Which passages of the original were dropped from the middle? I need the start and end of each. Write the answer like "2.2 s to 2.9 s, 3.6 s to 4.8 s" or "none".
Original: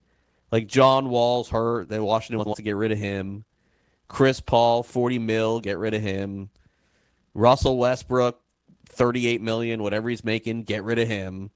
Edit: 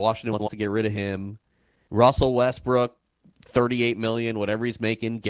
3.9 s to 7.3 s